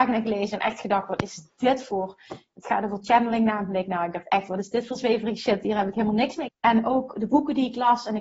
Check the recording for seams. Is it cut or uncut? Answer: cut